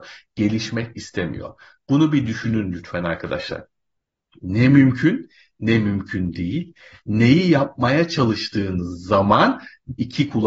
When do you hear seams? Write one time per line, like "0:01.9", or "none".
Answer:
none